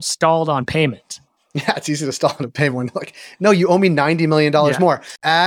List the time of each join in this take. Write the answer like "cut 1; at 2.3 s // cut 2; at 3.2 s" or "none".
none